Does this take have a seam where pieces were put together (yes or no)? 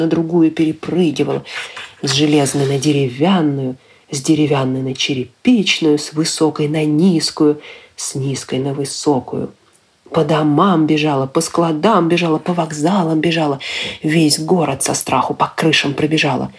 no